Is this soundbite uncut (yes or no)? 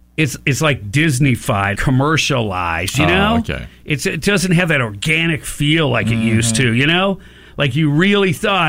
no